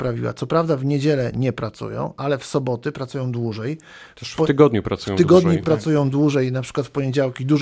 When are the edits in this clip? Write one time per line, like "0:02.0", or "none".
none